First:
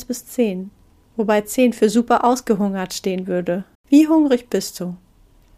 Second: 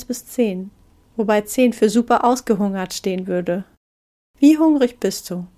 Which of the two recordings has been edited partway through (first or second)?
first